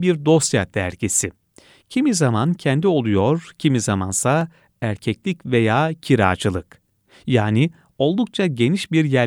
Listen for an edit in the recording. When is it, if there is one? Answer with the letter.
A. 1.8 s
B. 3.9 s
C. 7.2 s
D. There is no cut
D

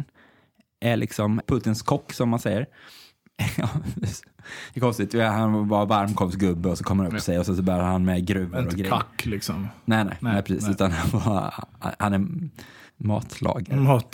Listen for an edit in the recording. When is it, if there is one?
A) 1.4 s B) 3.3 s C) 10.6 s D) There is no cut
A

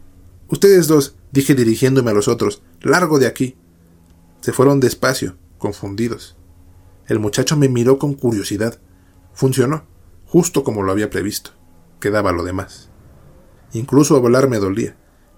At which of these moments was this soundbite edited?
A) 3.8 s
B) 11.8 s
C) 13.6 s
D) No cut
C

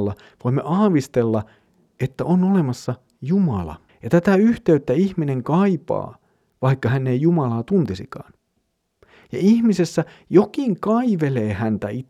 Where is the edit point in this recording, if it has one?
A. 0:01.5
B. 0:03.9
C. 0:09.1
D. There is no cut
B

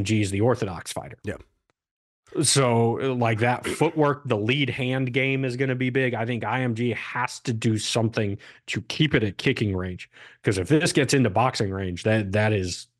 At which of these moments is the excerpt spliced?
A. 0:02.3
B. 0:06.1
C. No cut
C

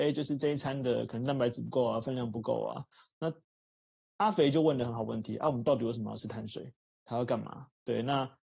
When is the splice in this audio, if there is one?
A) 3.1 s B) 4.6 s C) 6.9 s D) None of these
D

